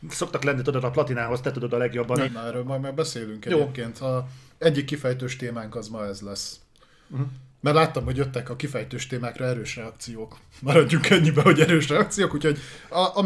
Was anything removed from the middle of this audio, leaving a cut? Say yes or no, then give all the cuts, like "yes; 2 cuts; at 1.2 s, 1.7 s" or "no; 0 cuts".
yes; 1 cut; at 2.2 s